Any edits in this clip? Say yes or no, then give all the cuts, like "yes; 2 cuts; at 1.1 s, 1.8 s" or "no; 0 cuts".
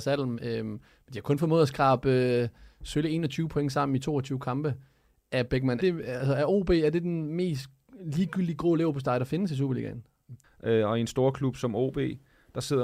yes; 2 cuts; at 5.8 s, 10.4 s